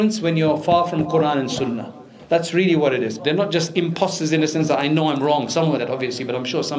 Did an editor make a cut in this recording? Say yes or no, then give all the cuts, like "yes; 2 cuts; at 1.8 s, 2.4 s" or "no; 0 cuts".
yes; 2 cuts; at 3.2 s, 5.8 s